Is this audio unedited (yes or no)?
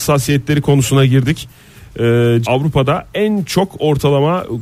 no